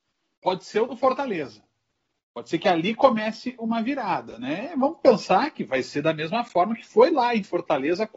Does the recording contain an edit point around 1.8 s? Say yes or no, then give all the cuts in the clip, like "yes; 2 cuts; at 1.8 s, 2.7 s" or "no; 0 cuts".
no; 0 cuts